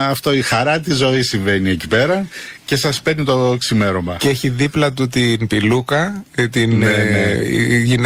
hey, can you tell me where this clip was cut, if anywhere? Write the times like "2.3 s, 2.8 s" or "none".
none